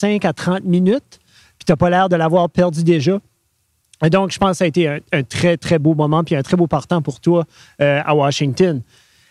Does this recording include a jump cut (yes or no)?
no